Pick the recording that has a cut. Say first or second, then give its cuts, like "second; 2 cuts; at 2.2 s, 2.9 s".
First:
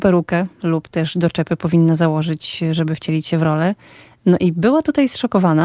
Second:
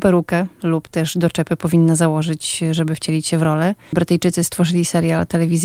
second; 1 cut; at 3.9 s